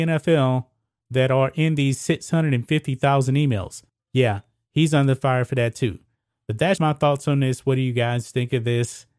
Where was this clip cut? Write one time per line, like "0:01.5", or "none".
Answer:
0:04.0
0:06.8